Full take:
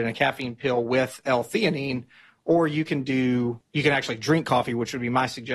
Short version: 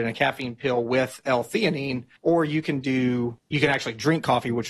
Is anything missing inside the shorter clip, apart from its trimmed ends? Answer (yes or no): yes